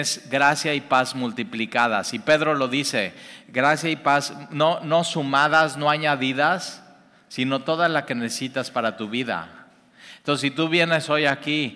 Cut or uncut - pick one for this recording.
uncut